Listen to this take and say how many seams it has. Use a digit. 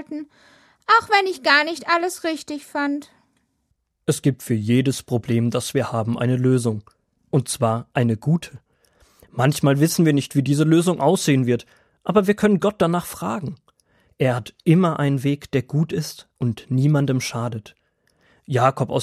0